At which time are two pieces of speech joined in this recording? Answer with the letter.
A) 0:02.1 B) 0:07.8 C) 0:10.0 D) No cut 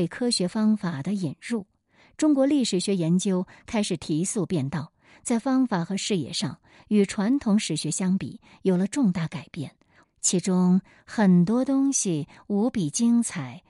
C